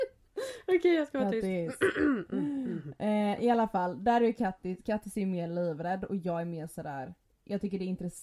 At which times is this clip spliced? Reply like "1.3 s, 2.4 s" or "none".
none